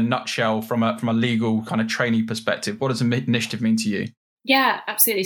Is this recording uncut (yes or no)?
yes